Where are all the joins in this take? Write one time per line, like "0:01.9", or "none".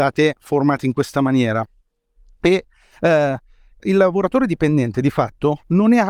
0:03.8

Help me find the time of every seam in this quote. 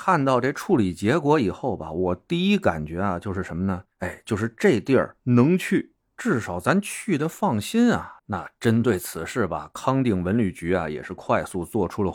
0:03.9
0:08.2

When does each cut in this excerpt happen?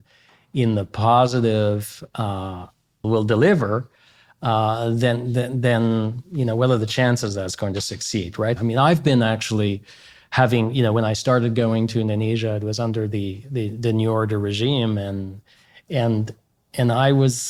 0:03.0
0:08.6

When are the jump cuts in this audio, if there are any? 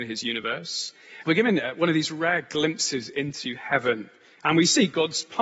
0:01.2

